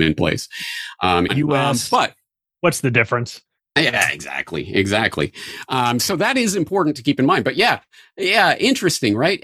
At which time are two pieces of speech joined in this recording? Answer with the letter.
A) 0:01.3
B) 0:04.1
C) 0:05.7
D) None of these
A